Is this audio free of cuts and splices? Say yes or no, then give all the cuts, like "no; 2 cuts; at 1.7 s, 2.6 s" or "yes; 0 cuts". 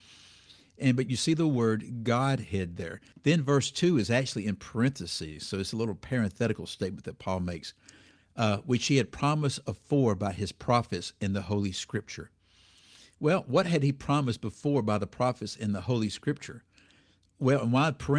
no; 1 cut; at 3.1 s